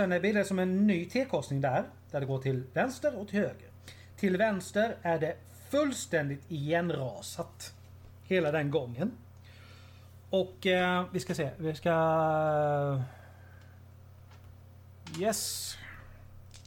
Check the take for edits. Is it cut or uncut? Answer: uncut